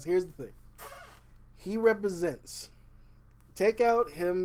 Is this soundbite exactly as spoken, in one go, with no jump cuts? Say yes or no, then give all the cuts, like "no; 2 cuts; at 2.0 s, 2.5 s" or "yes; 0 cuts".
yes; 0 cuts